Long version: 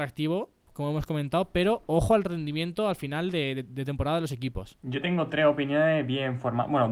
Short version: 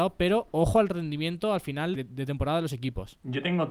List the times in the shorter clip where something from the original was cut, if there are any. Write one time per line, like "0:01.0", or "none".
0:02.0

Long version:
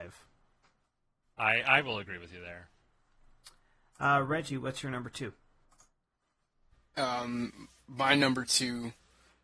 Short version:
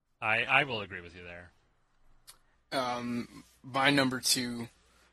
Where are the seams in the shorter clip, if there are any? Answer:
0:02.5

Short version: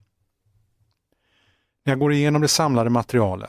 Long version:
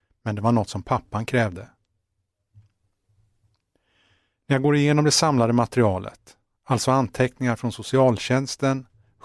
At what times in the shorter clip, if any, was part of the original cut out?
none

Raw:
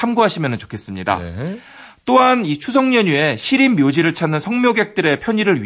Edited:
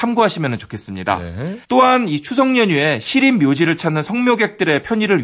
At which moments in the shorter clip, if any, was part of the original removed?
0:01.6

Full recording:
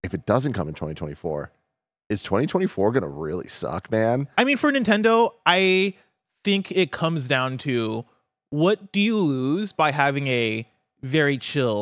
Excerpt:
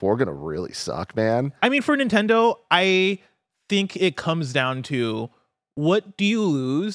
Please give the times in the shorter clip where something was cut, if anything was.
none

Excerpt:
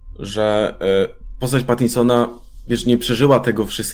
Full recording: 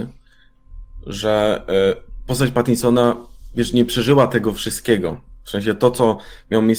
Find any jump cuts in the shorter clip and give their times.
none

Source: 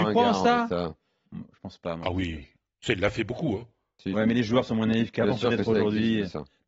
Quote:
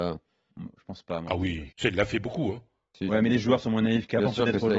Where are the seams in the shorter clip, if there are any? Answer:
0:01.7

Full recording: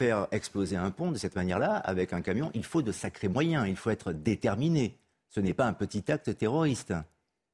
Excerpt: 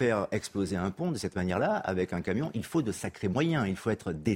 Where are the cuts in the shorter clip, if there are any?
none

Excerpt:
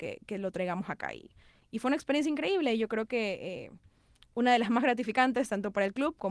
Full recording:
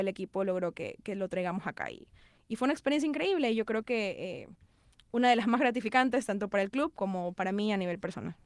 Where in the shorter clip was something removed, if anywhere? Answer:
none

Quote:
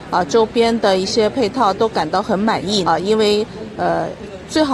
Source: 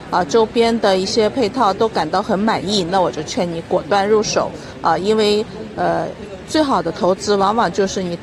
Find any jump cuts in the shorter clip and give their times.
0:02.9

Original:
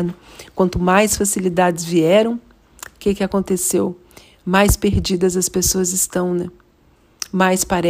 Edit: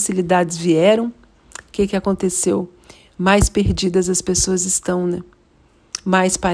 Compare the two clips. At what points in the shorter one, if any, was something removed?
none

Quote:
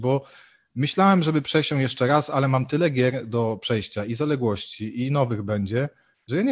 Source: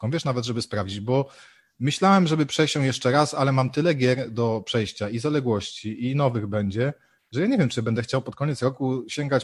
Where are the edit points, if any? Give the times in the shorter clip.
none

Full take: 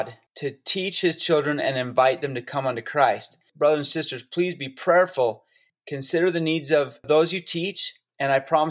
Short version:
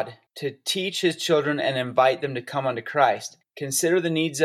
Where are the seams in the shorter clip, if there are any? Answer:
0:03.4

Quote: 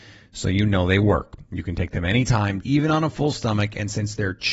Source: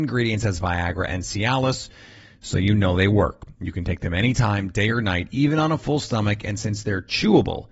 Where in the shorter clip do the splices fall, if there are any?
0:02.6

